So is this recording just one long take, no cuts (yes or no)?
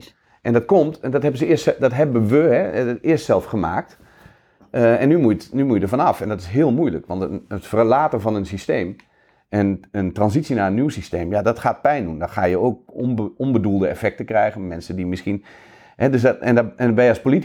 yes